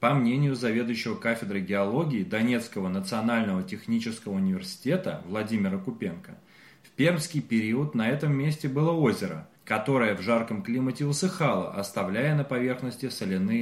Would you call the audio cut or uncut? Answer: cut